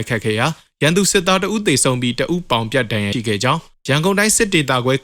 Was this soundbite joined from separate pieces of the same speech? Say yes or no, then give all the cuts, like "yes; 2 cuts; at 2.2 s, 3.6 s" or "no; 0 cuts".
yes; 1 cut; at 3.1 s